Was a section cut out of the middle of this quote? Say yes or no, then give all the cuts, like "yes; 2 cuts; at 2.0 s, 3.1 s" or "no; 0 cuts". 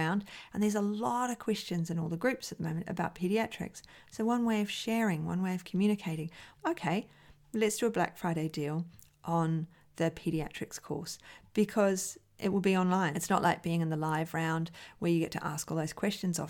yes; 2 cuts; at 6.5 s, 13.1 s